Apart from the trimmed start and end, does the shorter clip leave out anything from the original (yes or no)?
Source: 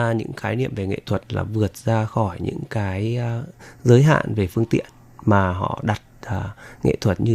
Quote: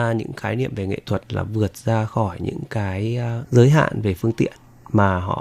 yes